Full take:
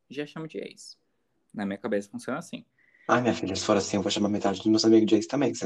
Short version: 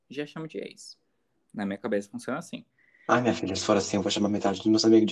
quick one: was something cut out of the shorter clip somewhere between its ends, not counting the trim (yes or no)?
no